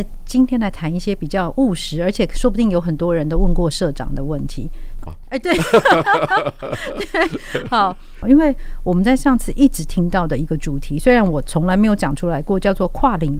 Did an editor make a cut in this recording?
yes; 2 cuts; at 5.1 s, 8.2 s

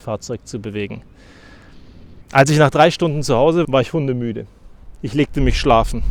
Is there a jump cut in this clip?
yes; 2 cuts; at 2.2 s, 3.6 s

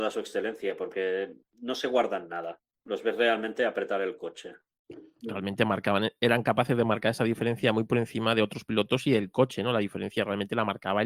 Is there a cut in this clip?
yes; 1 cut; at 5.2 s

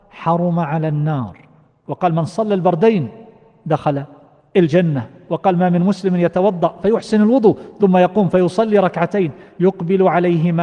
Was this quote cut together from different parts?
no; 0 cuts

